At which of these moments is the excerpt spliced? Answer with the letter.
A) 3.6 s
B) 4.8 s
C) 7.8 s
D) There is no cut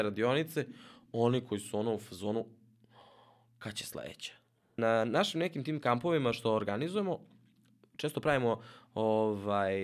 B